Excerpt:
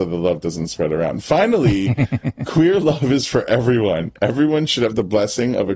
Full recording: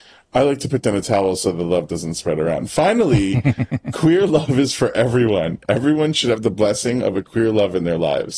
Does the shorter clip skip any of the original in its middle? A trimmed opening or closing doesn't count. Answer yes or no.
no